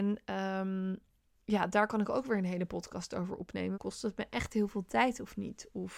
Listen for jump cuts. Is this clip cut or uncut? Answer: cut